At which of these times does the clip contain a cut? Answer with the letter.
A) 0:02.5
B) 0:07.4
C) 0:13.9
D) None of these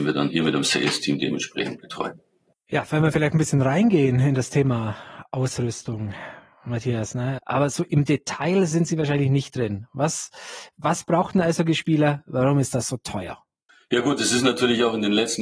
B